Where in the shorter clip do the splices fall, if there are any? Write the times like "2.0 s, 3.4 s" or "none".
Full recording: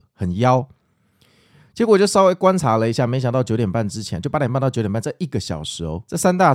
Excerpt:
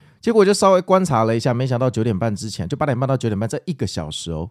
none